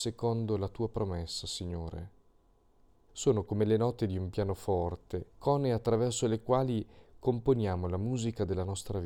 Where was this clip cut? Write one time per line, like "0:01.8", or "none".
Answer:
0:03.1
0:05.3